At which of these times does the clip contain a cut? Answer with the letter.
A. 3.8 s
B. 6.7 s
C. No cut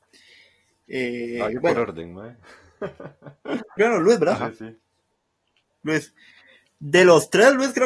A